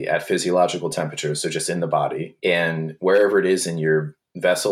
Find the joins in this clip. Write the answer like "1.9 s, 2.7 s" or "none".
2.4 s